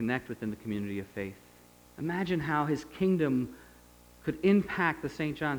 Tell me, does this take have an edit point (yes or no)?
yes